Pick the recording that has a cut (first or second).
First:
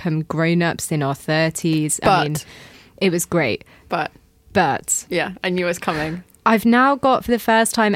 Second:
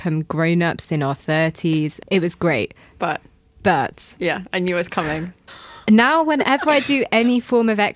second